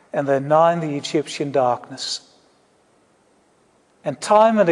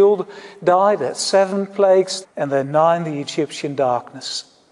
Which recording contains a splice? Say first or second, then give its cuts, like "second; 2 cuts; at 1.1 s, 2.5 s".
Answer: second; 1 cut; at 2.2 s